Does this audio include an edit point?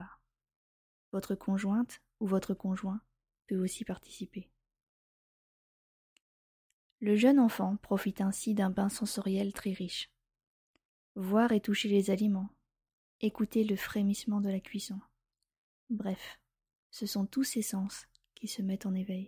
yes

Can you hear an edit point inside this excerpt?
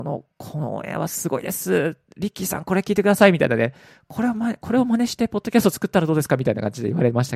no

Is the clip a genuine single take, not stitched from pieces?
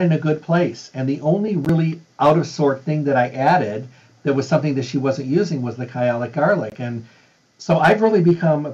yes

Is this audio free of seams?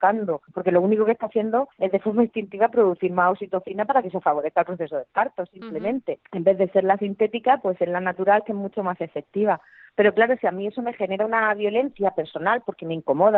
yes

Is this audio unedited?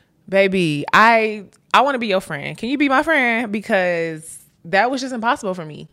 yes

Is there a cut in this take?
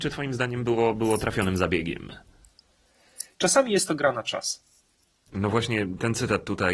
yes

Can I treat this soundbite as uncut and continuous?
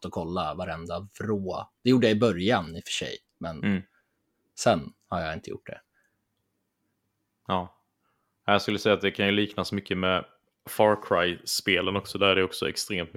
yes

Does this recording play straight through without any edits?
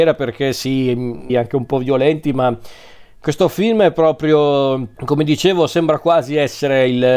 no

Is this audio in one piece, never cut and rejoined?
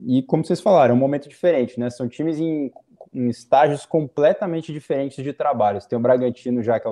yes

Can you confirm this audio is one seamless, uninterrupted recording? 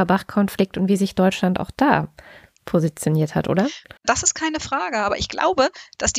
no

